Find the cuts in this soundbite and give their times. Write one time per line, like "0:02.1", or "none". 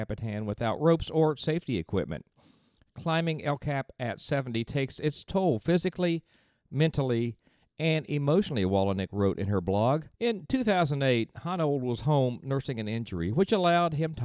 0:10.1